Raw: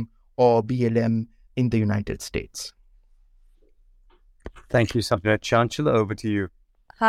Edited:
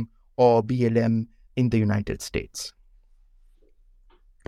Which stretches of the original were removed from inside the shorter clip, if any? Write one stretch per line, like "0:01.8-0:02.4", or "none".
none